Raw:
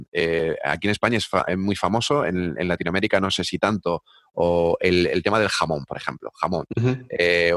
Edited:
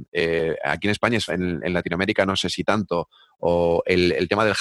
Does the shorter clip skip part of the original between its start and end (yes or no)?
yes